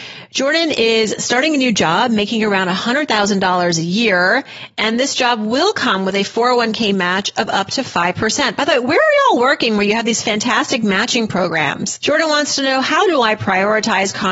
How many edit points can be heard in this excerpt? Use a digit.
1